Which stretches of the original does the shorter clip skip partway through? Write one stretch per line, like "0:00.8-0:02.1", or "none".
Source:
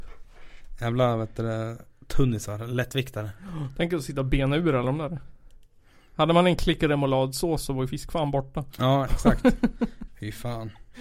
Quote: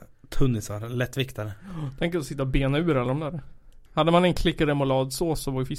0:05.6-0:06.1